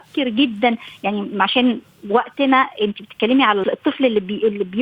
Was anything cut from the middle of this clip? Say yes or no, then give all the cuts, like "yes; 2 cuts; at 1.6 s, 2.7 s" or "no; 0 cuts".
yes; 1 cut; at 3.6 s